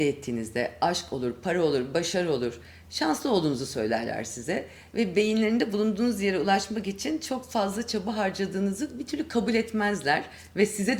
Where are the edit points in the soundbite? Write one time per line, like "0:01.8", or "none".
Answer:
none